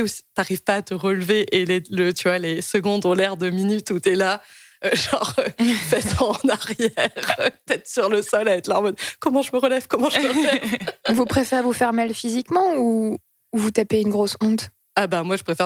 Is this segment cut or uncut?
uncut